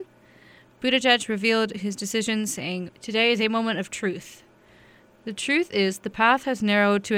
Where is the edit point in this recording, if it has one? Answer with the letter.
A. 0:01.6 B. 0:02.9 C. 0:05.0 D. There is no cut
B